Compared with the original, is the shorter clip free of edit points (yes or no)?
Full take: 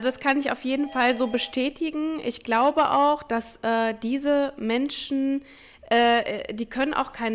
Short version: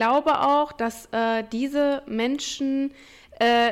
yes